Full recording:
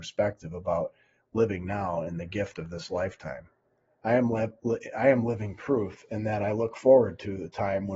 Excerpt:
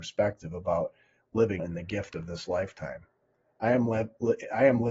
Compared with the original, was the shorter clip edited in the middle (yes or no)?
yes